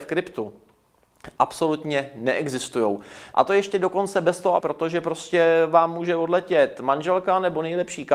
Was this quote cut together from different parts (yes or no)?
yes